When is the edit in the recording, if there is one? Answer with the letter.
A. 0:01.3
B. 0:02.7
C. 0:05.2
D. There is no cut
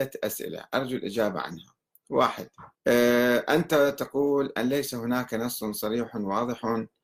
B